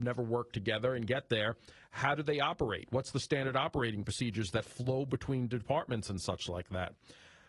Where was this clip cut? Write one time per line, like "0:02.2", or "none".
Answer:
none

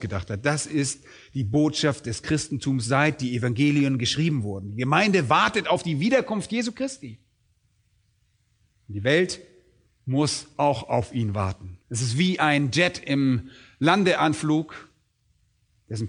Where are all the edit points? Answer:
0:09.9
0:11.8

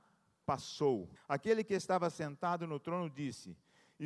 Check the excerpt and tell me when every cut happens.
0:01.2

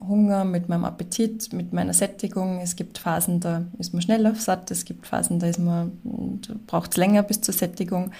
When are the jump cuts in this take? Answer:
none

